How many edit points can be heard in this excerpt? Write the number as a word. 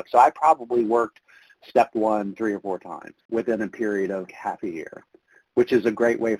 two